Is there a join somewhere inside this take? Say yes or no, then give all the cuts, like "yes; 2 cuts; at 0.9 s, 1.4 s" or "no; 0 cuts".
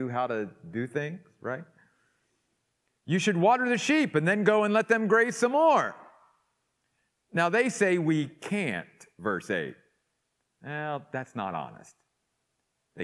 no; 0 cuts